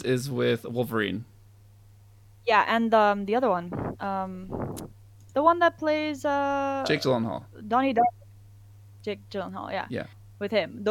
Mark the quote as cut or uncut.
cut